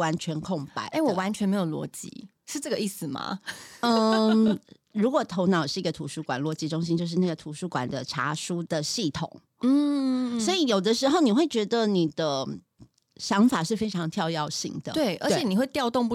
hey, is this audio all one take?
yes; 0 cuts

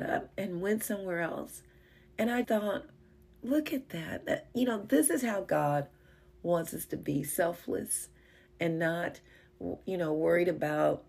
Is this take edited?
yes; 1 cut; at 2.4 s

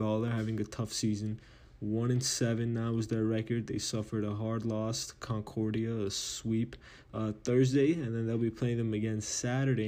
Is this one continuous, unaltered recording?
yes; 0 cuts

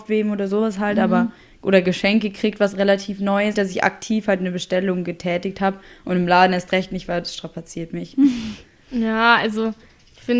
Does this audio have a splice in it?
yes; 1 cut; at 3.5 s

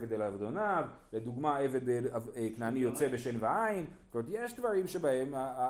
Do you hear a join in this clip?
no; 0 cuts

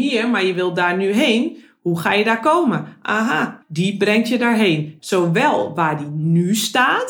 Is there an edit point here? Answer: yes; 2 cuts; at 3.6 s, 5.0 s

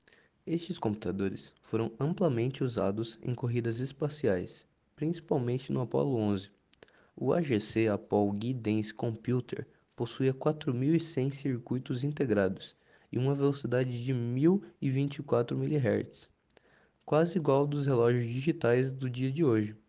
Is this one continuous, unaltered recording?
yes; 0 cuts

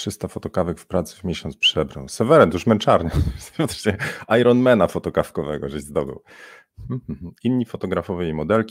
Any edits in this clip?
no; 0 cuts

